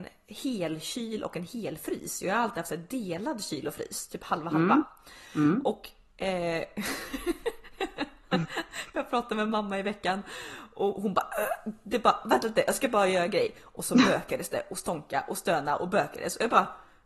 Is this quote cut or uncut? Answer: uncut